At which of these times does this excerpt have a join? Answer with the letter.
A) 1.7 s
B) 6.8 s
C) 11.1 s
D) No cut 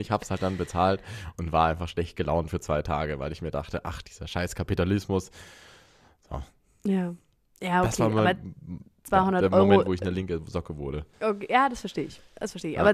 C